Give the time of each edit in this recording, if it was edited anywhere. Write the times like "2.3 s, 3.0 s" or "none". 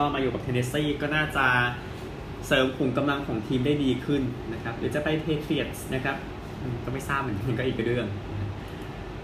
7.4 s

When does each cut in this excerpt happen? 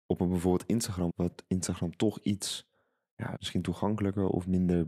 1.1 s, 3.4 s

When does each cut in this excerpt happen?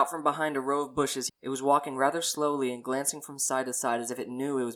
1.3 s

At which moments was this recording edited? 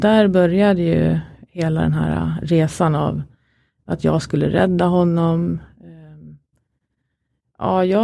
none

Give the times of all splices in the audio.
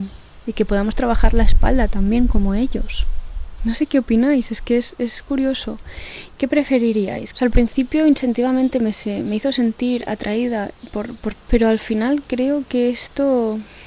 7.3 s, 11.3 s

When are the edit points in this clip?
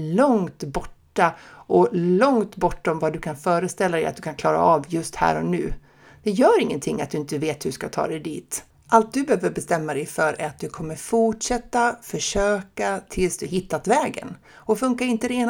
none

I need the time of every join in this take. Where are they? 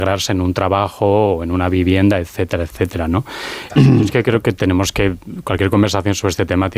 3.7 s

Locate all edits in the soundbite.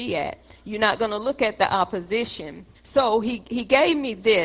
2.7 s

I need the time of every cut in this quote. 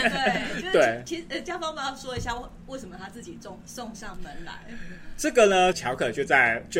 5.7 s

